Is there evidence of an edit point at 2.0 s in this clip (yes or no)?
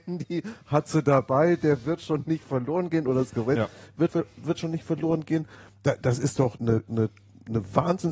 no